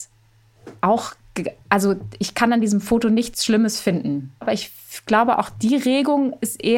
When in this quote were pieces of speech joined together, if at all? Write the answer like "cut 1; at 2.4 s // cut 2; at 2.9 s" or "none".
cut 1; at 4.4 s

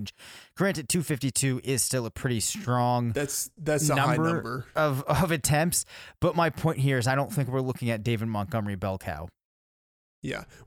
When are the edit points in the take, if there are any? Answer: none

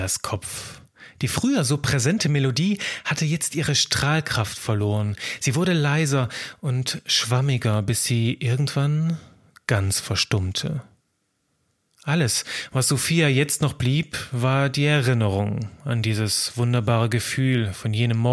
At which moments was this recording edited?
none

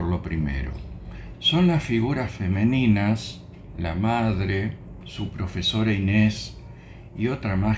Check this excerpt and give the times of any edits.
cut 1; at 1.3 s // cut 2; at 5.0 s

